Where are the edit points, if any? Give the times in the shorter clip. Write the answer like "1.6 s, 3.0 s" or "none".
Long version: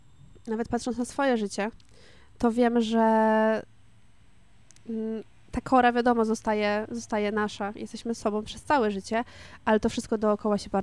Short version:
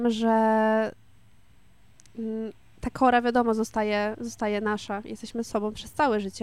none